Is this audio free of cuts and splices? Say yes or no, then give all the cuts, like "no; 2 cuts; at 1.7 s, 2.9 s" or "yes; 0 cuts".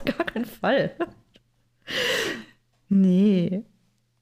yes; 0 cuts